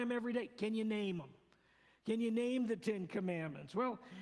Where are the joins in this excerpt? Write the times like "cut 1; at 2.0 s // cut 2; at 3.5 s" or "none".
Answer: none